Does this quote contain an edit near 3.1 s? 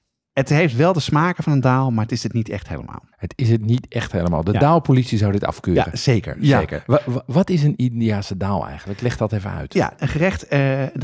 yes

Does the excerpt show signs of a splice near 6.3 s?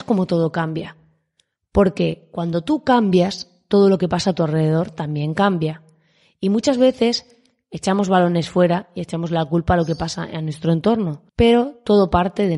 no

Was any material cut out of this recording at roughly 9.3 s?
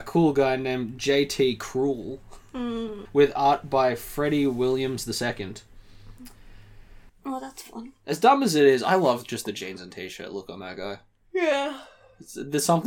no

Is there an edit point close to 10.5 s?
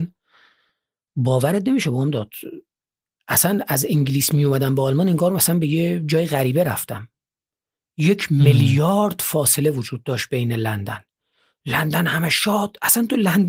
no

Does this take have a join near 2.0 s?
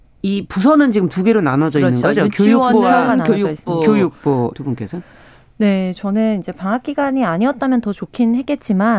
no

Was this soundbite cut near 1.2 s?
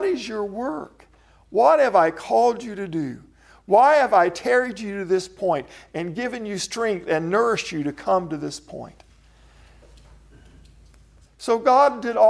no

